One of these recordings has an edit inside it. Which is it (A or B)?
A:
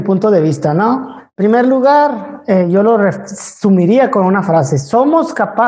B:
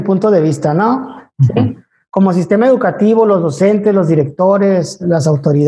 B